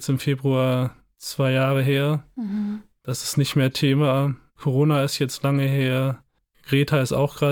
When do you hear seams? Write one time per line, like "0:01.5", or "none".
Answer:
none